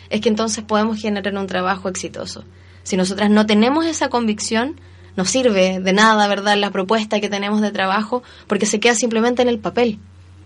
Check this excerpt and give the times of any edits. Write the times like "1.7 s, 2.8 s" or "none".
none

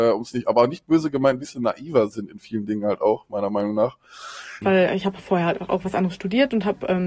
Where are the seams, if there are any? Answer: 4.6 s

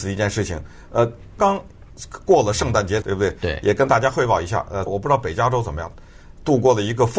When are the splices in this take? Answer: 1.4 s, 3.0 s, 4.9 s

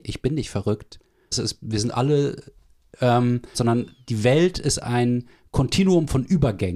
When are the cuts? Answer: 1.3 s, 3.5 s

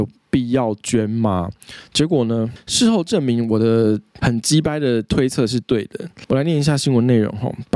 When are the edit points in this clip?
none

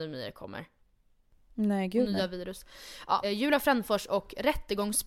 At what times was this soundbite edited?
3.2 s

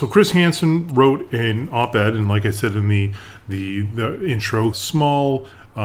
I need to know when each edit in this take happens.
4.7 s

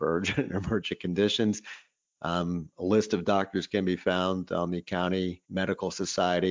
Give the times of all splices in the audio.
5.4 s

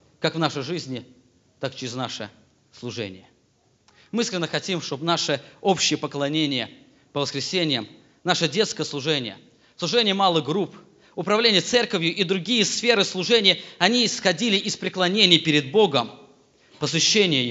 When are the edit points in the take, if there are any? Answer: none

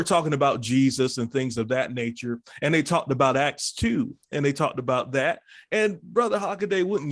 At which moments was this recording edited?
none

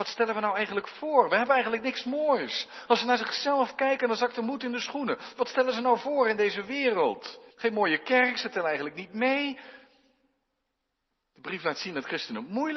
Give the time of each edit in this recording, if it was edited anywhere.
7.5 s

